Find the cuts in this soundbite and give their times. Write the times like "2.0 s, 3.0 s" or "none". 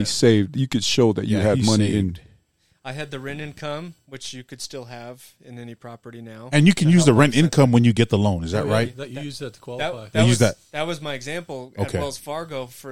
none